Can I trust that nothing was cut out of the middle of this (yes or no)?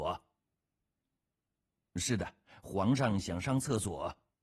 yes